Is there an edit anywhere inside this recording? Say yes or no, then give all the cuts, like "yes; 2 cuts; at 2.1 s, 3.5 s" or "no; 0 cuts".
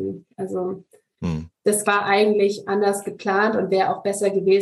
yes; 1 cut; at 1.8 s